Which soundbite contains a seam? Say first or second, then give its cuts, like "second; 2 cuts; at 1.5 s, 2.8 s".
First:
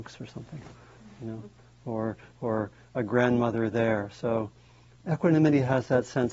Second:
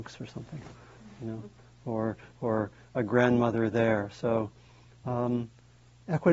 first; 1 cut; at 5.0 s